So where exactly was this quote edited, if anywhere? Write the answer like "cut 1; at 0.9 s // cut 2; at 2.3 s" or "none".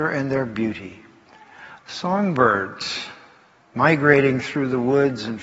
cut 1; at 1.8 s